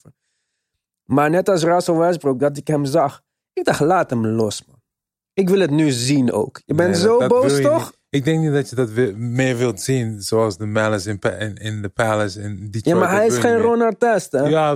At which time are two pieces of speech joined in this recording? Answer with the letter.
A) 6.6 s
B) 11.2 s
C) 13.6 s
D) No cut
D